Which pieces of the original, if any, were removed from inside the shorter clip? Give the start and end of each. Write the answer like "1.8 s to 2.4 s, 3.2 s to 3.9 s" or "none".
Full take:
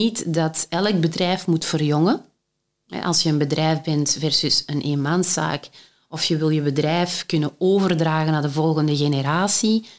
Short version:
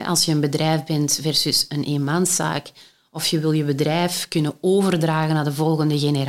none